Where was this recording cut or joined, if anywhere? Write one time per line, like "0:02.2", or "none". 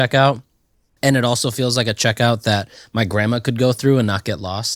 none